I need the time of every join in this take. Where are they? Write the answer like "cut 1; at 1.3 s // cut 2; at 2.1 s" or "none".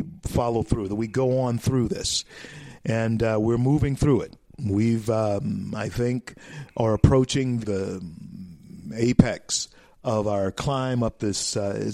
cut 1; at 7.6 s